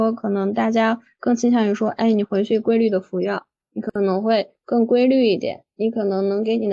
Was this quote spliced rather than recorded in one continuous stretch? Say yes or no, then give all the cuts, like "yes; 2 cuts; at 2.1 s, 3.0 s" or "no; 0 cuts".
no; 0 cuts